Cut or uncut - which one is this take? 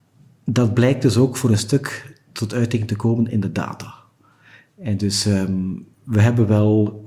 cut